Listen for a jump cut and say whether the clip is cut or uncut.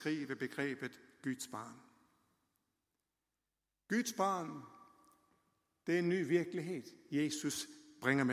uncut